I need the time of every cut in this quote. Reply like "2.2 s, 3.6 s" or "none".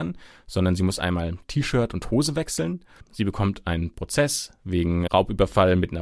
3.0 s, 5.1 s